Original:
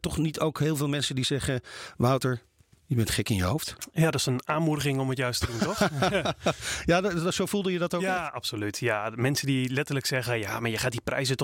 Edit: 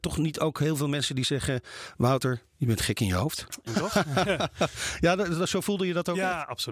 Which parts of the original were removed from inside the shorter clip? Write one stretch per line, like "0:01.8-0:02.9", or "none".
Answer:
0:02.5-0:02.8
0:04.0-0:05.5